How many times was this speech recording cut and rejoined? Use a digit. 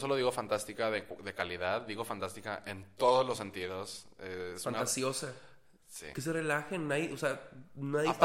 0